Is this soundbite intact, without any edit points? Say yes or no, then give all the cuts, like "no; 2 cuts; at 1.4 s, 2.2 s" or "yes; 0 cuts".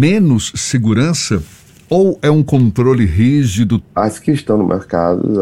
no; 1 cut; at 3.8 s